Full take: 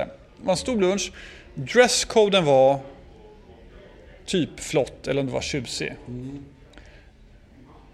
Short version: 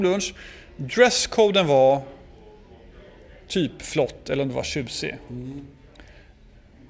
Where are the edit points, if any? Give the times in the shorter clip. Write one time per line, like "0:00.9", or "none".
none

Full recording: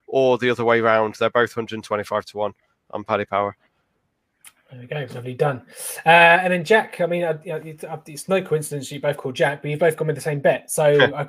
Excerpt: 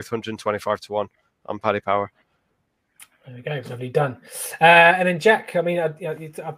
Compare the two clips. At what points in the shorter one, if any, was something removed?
none

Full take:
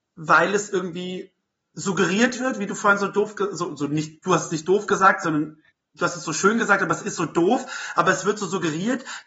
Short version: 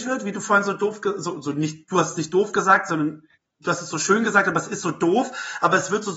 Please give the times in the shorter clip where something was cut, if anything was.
none

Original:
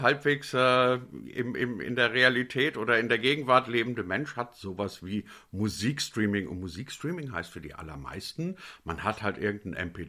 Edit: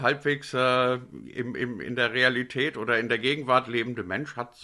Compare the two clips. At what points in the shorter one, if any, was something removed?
none

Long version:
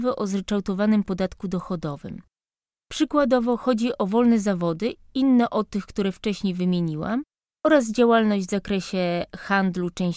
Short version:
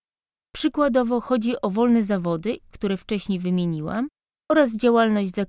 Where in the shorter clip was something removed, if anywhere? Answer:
0:02.7

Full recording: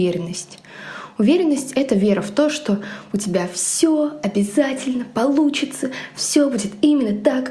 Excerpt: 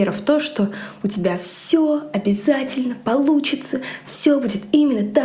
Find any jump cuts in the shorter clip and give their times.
none

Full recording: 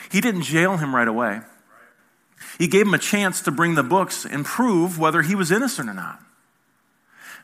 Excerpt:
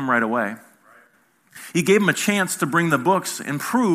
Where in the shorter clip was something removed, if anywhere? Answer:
none

